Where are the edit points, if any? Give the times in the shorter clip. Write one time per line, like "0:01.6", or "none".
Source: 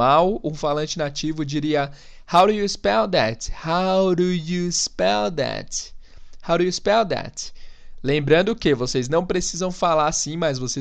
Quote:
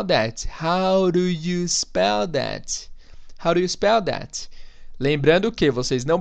none

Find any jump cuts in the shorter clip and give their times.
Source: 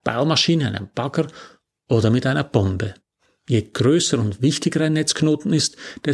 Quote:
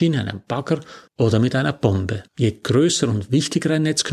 0:01.1
0:02.3

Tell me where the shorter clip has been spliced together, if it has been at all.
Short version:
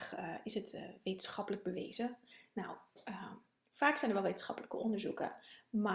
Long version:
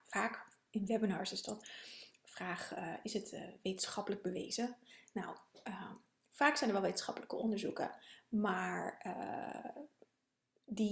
none

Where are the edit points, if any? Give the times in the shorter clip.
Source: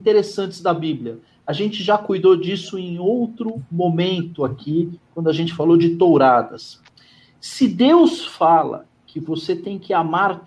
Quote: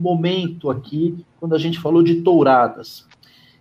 none

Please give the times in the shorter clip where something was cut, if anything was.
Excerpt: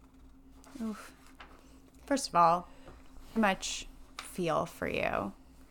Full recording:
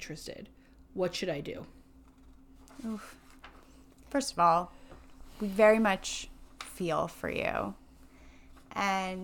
0:03.4

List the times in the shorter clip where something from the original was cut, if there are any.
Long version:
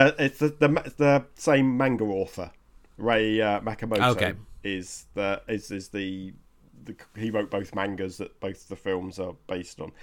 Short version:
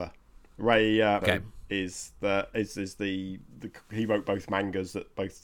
0:01.2
0:03.5

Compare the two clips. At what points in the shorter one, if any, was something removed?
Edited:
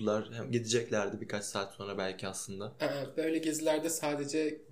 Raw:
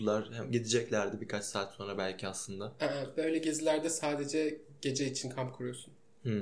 none

